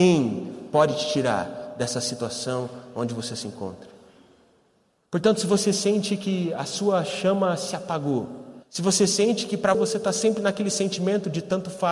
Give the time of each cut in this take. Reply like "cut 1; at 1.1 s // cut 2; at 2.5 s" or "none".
cut 1; at 5.0 s // cut 2; at 8.6 s // cut 3; at 9.7 s